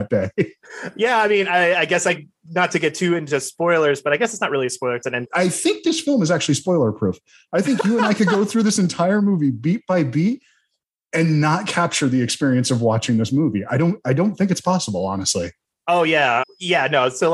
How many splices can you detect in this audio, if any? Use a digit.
2